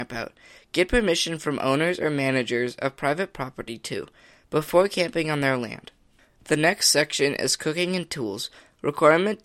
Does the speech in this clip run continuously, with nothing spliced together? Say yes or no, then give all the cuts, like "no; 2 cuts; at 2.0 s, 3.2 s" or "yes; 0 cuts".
yes; 0 cuts